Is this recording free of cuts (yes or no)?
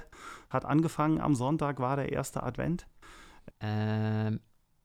no